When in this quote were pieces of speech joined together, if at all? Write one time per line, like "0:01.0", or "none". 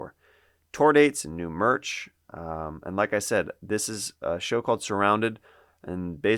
none

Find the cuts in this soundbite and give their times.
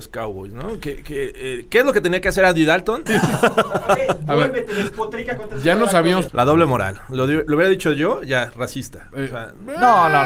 0:03.1
0:06.3

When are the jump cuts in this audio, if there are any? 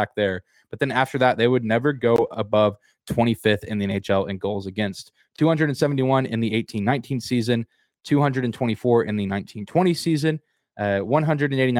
none

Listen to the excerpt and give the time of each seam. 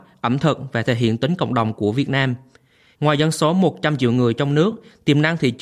0:03.0

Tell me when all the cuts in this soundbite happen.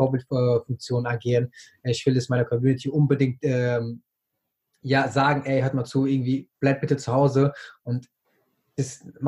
none

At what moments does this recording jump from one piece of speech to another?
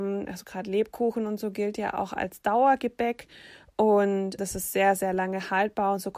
0:04.4

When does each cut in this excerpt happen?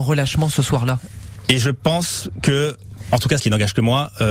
0:03.4

